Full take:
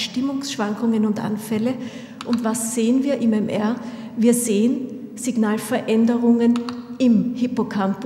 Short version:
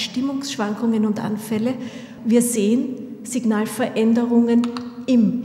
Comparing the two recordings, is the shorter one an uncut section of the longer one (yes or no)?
no